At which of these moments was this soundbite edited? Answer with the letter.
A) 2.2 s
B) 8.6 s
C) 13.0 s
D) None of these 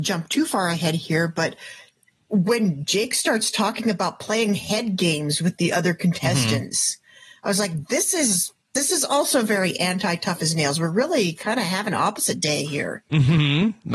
B